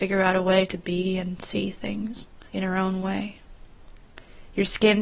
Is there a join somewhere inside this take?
yes; 1 cut; at 2.5 s

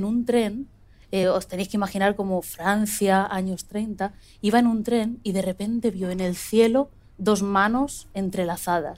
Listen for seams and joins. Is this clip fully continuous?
yes; 0 cuts

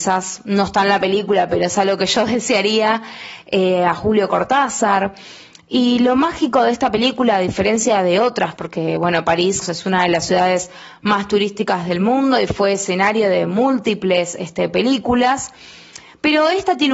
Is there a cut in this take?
yes; 2 cuts; at 8.6 s, 9.6 s

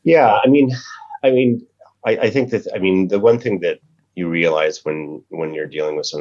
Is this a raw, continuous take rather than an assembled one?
yes; 0 cuts

